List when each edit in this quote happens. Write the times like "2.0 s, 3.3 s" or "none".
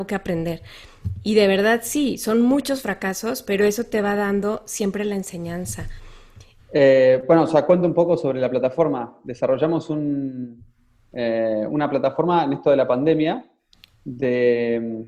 6.6 s